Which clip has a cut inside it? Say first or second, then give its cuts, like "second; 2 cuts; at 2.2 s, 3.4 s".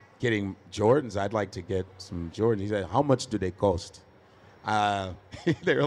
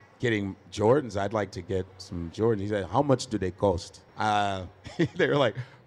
second; 1 cut; at 4.1 s